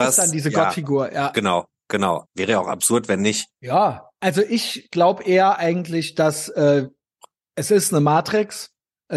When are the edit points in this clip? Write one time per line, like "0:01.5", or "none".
0:02.2
0:03.6